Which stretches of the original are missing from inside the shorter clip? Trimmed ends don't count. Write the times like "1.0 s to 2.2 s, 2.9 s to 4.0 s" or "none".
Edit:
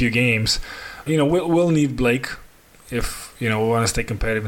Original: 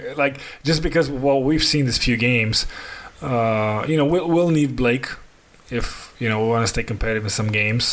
3.1 s to 3.9 s